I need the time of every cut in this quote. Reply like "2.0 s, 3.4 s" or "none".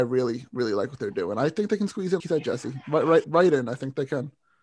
2.2 s, 3.2 s